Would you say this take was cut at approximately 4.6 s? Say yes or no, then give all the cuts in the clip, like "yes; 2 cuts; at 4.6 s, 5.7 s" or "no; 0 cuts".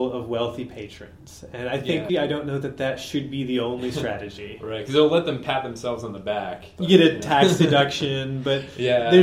no; 1 cut; at 2.1 s